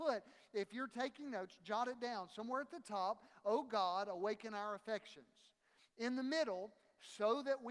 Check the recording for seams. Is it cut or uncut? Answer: uncut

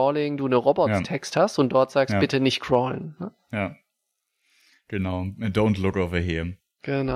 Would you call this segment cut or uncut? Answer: uncut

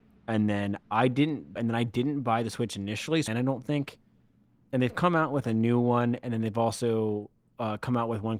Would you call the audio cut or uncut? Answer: cut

